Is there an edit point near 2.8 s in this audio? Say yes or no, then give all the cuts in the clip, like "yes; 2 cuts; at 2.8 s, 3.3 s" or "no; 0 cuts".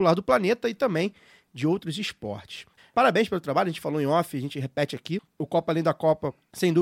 yes; 1 cut; at 2.8 s